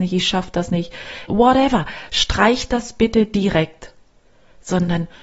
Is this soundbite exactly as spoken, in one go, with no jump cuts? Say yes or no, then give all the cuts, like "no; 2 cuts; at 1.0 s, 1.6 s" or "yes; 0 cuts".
no; 1 cut; at 1.3 s